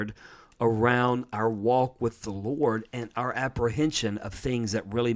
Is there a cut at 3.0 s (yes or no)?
no